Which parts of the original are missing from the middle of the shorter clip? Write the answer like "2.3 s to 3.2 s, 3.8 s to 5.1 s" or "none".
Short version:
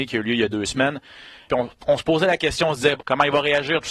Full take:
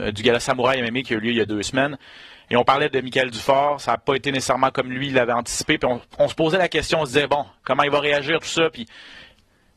2.4 s to 5.8 s, 7.3 s to 7.6 s